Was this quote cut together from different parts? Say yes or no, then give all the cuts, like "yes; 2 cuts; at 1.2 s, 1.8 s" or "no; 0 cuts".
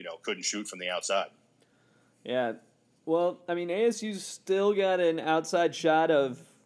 no; 0 cuts